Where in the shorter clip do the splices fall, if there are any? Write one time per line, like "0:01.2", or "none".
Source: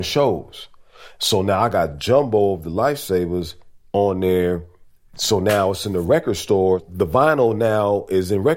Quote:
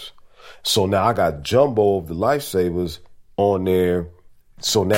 none